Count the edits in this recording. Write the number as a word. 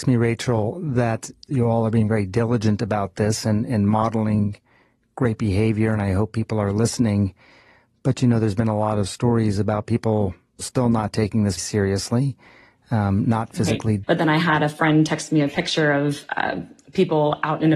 two